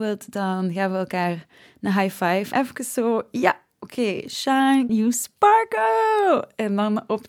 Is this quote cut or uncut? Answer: cut